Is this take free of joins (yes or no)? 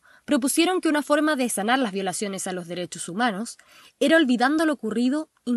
yes